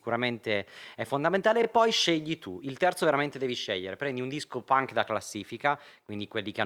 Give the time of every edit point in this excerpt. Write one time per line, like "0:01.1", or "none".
none